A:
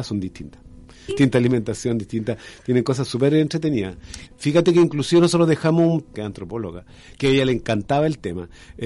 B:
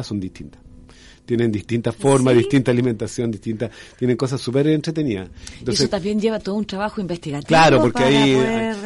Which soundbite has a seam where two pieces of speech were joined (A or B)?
A